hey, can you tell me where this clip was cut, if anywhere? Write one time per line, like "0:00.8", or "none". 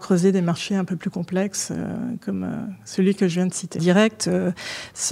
0:03.8